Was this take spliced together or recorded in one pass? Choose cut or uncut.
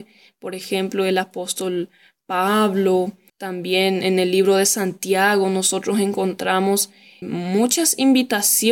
cut